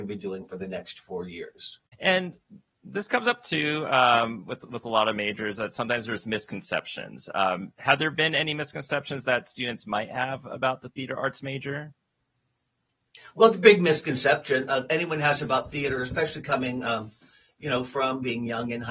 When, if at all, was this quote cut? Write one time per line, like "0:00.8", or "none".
0:01.9